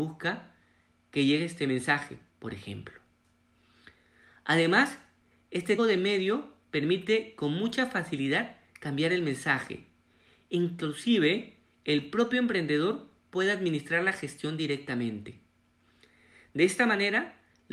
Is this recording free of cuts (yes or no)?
no